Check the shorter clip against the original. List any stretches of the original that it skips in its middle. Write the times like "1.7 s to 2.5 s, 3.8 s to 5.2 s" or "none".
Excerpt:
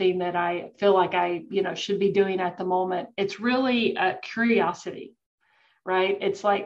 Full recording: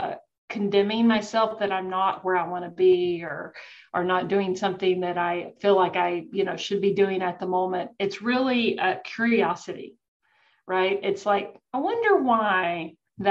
none